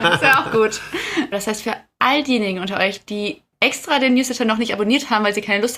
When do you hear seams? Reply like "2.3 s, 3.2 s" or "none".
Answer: 1.3 s